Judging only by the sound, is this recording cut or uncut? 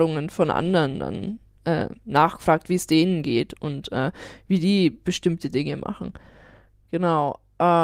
uncut